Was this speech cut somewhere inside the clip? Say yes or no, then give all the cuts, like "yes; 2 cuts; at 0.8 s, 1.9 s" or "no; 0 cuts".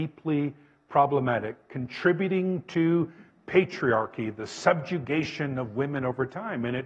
no; 0 cuts